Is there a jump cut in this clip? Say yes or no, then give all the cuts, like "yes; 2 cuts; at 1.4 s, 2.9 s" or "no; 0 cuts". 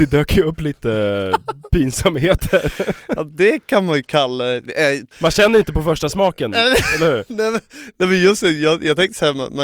yes; 1 cut; at 5.1 s